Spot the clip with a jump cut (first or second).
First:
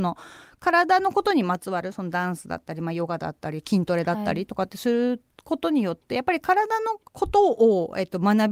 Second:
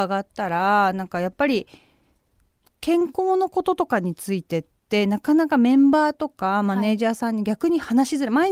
first